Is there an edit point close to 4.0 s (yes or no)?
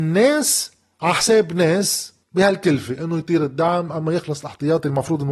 no